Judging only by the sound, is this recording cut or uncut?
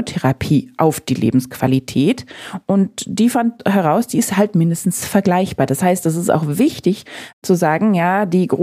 uncut